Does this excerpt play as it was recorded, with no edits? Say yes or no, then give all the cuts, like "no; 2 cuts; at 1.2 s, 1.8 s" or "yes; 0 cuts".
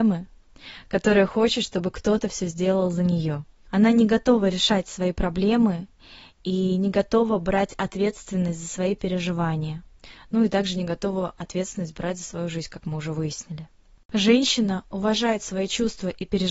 yes; 0 cuts